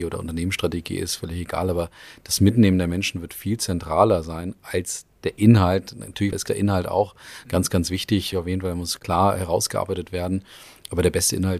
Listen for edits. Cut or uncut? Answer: uncut